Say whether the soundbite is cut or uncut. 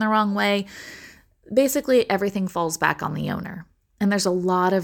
uncut